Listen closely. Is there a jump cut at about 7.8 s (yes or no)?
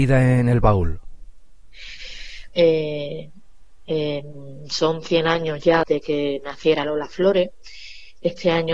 no